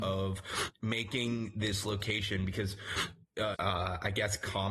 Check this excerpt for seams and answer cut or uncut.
cut